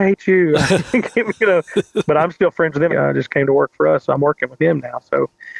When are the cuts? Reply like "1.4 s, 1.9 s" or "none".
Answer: 2.9 s